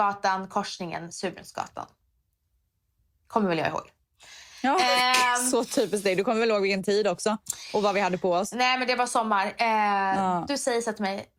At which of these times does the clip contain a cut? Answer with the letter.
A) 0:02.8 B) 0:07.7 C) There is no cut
C